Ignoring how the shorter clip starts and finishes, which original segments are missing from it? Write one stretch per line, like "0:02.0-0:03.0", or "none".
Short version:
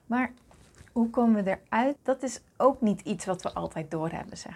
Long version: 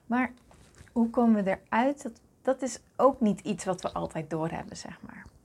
0:02.0-0:02.3